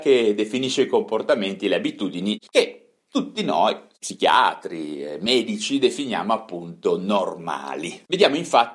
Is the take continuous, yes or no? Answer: no